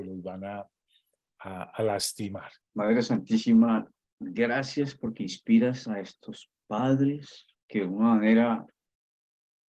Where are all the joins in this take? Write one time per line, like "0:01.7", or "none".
0:02.6
0:07.5